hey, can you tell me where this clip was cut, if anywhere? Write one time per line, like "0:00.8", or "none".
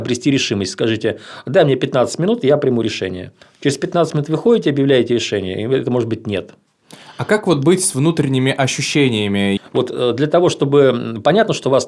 0:09.6